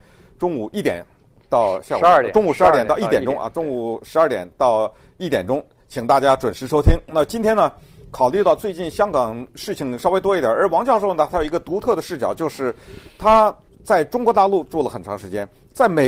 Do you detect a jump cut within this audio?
no; 0 cuts

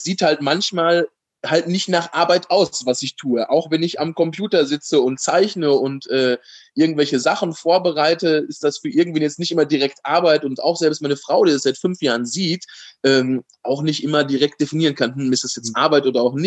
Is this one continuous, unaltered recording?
yes; 0 cuts

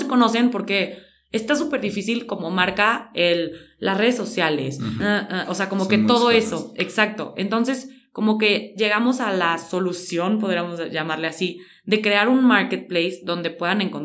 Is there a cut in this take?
yes; 1 cut; at 5.0 s

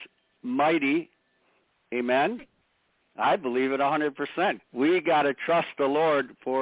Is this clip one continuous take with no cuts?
no; 2 cuts; at 3.0 s, 4.6 s

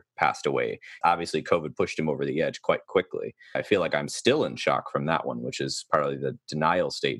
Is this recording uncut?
no; 2 cuts; at 1.0 s, 3.5 s

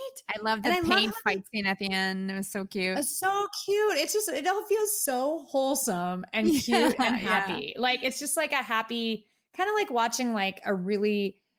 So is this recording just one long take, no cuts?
yes; 0 cuts

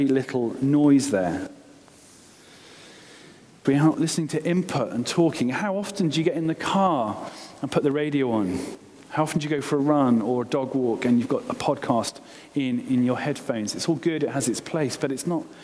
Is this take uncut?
no; 1 cut; at 3.6 s

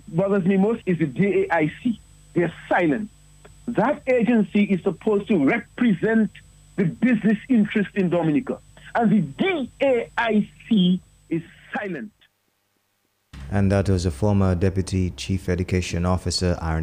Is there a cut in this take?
no; 0 cuts

